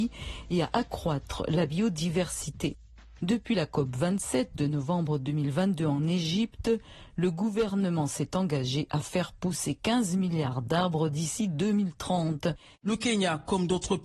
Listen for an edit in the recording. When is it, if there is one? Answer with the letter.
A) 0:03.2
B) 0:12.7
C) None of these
B